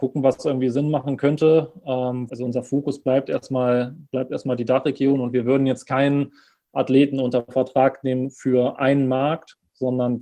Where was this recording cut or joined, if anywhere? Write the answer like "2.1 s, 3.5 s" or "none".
2.3 s